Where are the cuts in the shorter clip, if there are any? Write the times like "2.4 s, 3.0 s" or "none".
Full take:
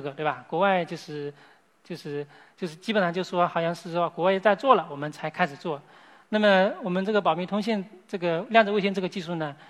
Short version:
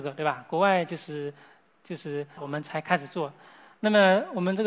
2.4 s